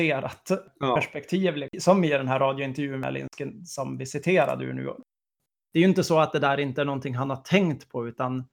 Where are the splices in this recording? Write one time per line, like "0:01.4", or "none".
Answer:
none